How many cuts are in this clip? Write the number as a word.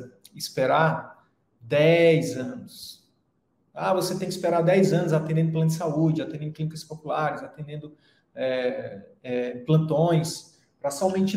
zero